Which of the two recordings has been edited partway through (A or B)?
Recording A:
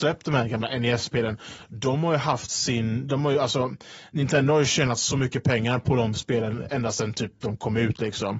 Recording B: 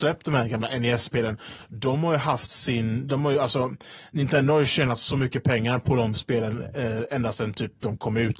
A